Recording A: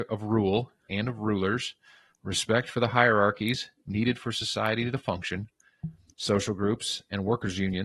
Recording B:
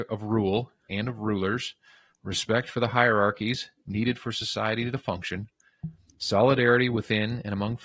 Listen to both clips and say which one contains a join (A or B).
A